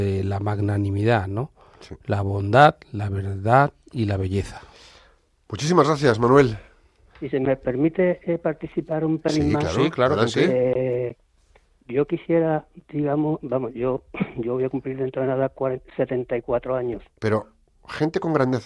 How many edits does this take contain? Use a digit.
2